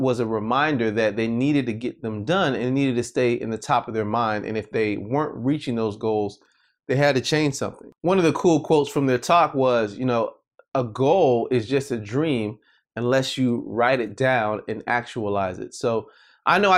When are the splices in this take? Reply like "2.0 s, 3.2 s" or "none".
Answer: none